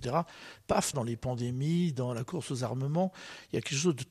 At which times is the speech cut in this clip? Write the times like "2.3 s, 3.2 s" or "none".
0.9 s